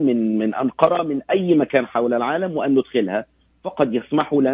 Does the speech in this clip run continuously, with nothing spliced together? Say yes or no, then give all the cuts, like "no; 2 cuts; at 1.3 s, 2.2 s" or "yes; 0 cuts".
yes; 0 cuts